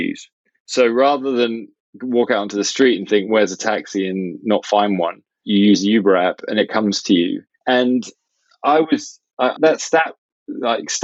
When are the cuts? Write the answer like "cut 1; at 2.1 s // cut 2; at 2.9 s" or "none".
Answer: cut 1; at 7.6 s // cut 2; at 9.6 s